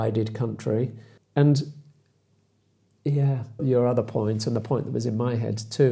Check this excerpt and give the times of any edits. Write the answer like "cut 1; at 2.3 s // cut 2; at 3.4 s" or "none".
cut 1; at 1.2 s // cut 2; at 3.6 s